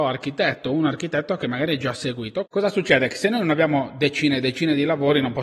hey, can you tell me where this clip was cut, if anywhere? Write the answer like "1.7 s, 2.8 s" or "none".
2.5 s